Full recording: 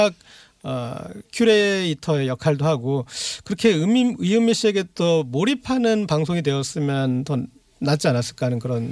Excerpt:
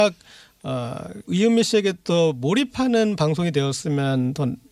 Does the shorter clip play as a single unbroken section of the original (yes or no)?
no